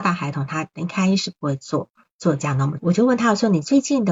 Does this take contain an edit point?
yes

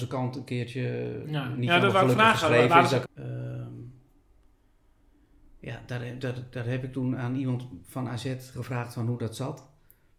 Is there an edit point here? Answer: yes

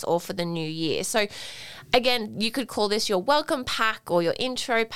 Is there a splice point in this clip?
no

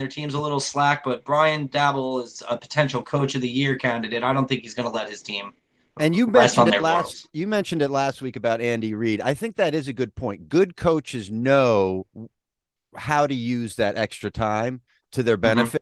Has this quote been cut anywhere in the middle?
no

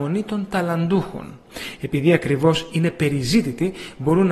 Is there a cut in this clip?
yes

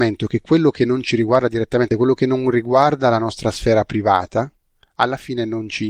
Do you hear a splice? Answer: no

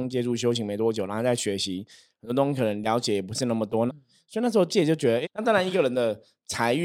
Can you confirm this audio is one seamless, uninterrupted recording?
no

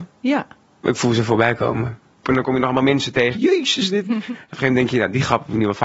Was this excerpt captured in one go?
no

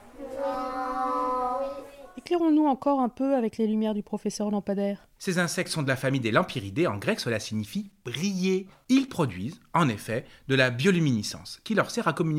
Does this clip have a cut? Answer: yes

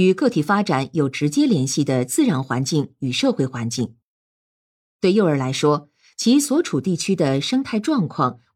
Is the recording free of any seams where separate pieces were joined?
yes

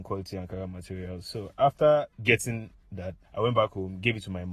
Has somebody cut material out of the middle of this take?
yes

